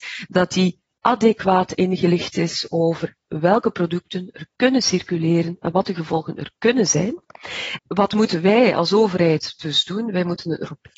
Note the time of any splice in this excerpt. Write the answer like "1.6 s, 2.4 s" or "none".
7.8 s